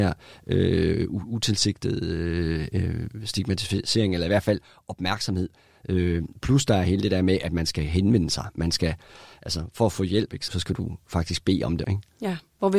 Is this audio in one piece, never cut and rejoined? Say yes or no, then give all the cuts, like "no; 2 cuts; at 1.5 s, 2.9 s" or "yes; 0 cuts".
no; 2 cuts; at 10.5 s, 11.8 s